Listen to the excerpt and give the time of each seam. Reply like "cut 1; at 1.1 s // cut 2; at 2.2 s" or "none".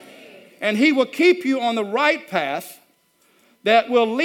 none